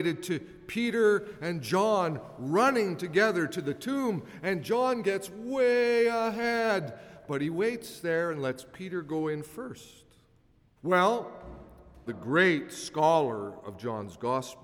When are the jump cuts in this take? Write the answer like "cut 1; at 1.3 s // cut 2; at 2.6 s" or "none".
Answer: cut 1; at 10.8 s // cut 2; at 12.1 s